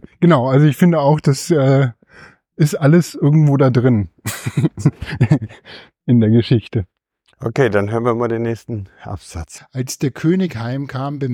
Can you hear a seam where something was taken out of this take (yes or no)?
yes